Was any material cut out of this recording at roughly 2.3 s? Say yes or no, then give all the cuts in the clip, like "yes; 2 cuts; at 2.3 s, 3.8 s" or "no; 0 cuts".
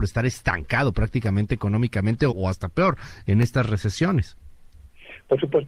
yes; 1 cut; at 2.3 s